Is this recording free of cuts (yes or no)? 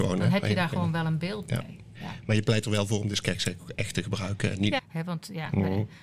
no